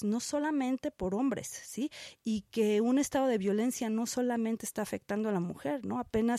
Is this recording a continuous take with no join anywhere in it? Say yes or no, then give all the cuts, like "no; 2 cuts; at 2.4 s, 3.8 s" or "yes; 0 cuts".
yes; 0 cuts